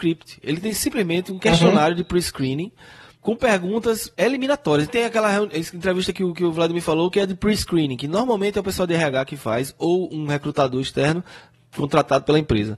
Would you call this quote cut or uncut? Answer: cut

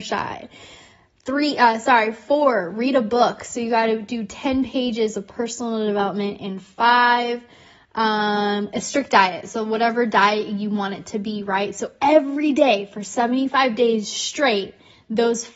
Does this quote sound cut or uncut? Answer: uncut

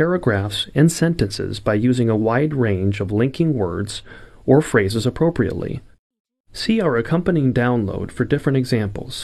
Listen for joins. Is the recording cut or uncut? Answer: uncut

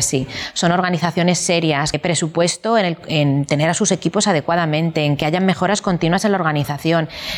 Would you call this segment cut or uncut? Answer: cut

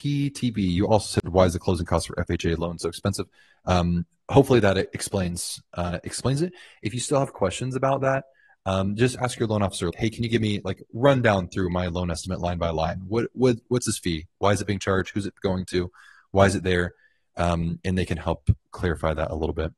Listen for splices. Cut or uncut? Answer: cut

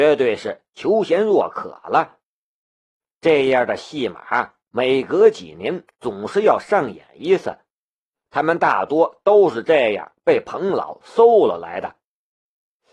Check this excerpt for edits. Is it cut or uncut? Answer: uncut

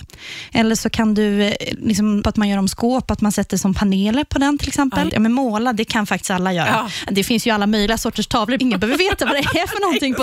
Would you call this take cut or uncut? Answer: cut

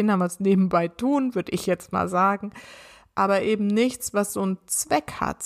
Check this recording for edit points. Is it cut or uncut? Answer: uncut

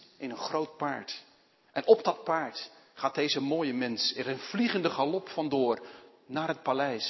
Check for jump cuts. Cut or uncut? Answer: uncut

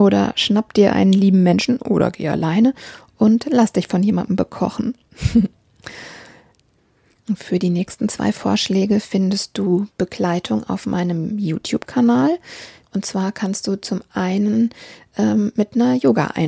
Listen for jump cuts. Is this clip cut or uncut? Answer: cut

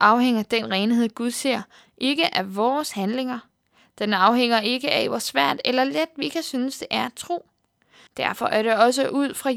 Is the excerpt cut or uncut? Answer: cut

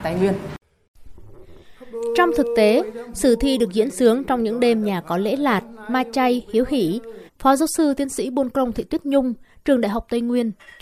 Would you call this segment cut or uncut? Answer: cut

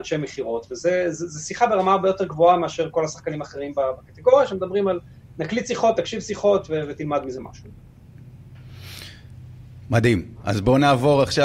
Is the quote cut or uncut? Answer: uncut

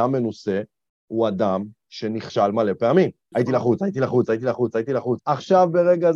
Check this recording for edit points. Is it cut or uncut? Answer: cut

